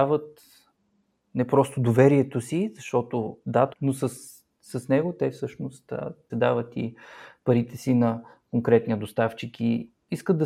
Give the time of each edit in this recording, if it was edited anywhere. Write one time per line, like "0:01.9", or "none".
0:03.7
0:06.3